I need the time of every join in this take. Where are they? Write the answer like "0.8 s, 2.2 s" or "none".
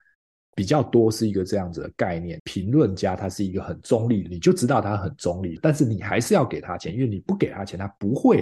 2.4 s, 5.6 s